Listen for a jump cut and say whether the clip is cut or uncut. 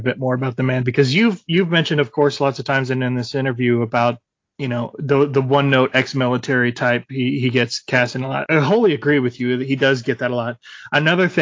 cut